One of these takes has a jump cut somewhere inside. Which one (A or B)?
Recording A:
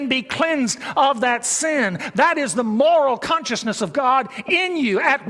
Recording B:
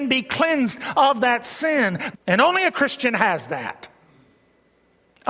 B